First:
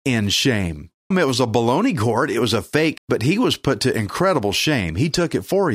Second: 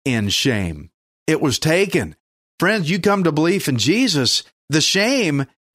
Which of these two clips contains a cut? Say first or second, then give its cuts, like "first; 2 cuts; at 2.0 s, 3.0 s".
first; 2 cuts; at 1.1 s, 3.0 s